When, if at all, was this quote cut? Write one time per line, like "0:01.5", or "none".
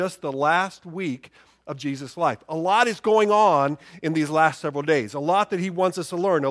none

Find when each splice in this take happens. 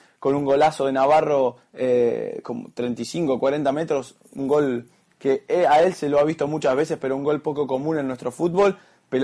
none

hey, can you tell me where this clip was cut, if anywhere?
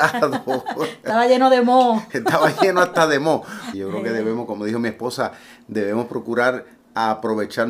0:03.7

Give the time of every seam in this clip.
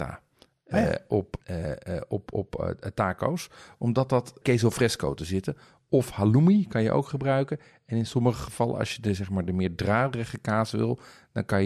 0:01.4
0:04.4

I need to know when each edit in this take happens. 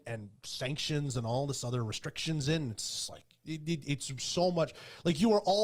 none

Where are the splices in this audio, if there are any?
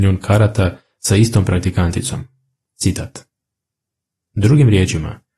0:02.7

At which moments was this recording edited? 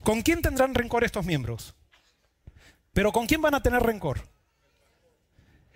0:02.9

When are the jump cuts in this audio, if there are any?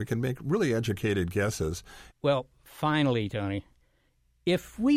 0:02.1

